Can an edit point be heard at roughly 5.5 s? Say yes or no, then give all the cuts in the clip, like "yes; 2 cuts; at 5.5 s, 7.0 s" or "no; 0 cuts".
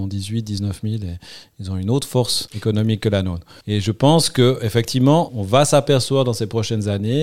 no; 1 cut; at 3.6 s